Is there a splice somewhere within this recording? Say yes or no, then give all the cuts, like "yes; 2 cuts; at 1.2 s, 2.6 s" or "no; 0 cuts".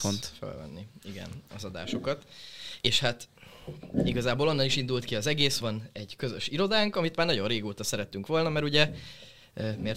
yes; 1 cut; at 5.6 s